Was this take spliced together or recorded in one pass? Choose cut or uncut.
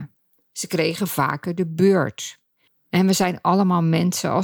cut